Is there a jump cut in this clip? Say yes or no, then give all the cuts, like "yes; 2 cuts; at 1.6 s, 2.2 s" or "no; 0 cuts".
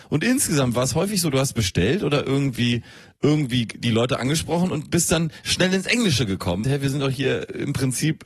yes; 1 cut; at 6.6 s